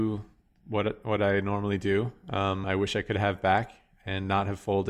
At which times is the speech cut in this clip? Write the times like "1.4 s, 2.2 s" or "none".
2.6 s